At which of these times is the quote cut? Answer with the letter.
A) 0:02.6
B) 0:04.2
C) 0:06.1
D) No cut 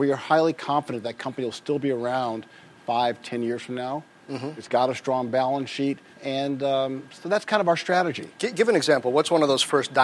C